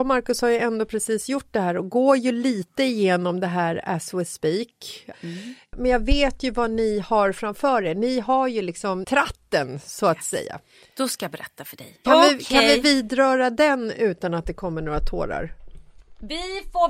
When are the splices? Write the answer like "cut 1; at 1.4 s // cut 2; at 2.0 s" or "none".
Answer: cut 1; at 5.1 s // cut 2; at 9.0 s // cut 3; at 12.0 s